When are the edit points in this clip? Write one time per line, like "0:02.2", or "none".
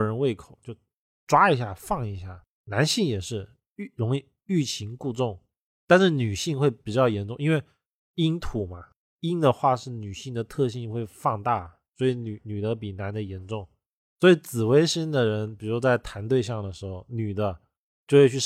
none